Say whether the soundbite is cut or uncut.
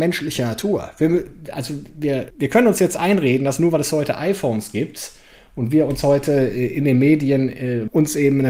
uncut